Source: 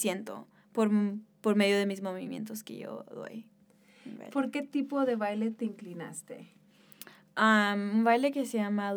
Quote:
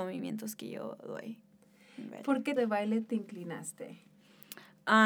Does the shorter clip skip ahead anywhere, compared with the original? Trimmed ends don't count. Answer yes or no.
yes